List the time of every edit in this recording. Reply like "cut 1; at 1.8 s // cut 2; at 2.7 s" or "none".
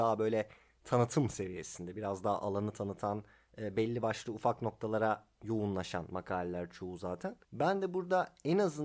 cut 1; at 7.4 s